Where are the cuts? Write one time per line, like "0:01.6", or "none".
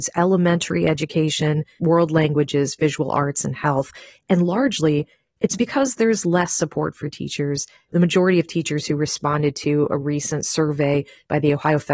0:01.8
0:07.9